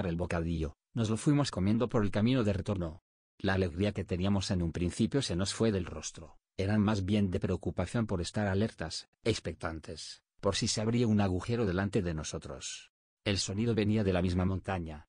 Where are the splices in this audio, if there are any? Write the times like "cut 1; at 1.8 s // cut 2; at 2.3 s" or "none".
cut 1; at 13.2 s